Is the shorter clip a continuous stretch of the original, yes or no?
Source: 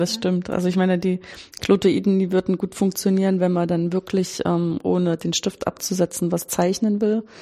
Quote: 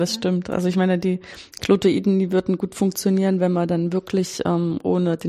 yes